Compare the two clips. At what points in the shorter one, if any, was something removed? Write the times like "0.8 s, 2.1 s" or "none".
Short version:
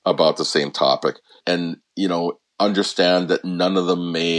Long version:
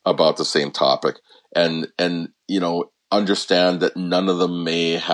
1.4 s